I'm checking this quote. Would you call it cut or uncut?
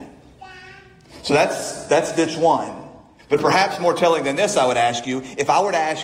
cut